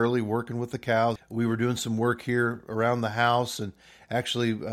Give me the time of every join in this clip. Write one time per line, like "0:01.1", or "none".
0:01.2